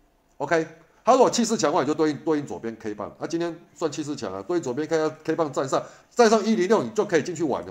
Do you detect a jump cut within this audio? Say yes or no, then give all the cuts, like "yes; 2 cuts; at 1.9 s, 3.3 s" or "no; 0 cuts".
no; 0 cuts